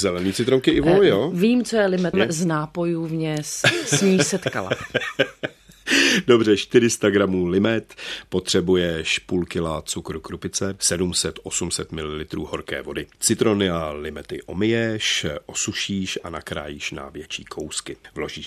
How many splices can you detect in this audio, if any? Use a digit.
1